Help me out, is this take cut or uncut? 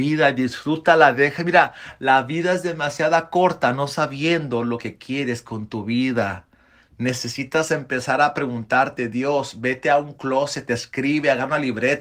uncut